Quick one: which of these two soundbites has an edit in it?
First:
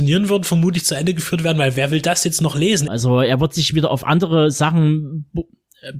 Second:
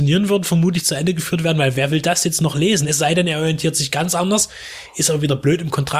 first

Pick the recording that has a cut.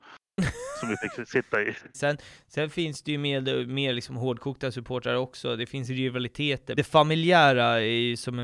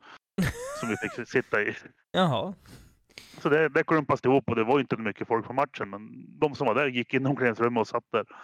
first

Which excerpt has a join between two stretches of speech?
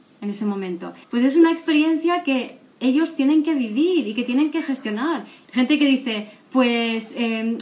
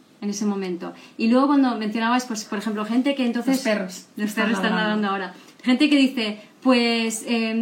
first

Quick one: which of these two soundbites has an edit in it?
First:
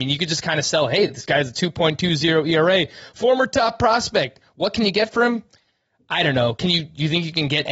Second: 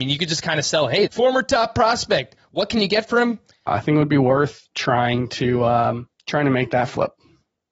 second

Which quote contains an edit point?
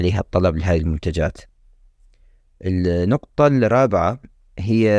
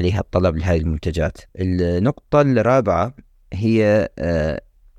second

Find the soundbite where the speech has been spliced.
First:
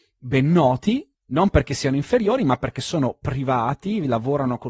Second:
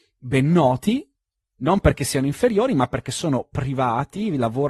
first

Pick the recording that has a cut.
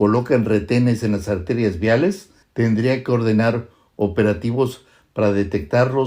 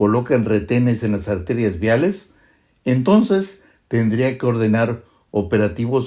first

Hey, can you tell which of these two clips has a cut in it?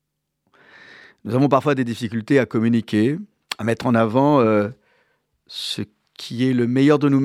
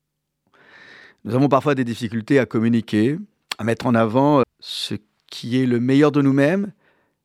second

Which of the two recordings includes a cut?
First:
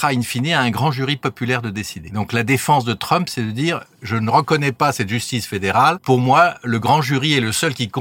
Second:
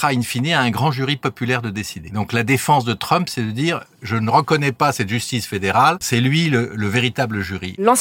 second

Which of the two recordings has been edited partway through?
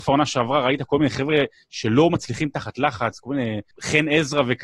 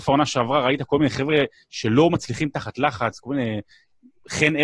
first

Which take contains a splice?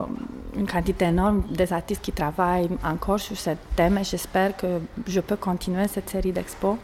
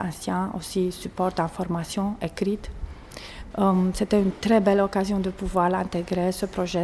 second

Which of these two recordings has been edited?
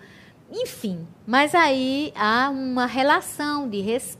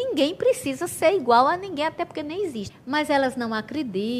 second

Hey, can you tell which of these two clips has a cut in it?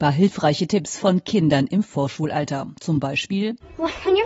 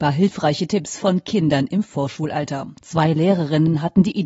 second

